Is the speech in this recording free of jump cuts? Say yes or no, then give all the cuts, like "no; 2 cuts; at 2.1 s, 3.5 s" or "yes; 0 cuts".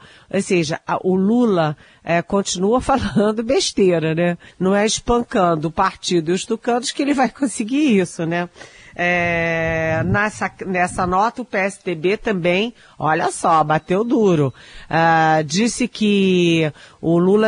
no; 1 cut; at 4.5 s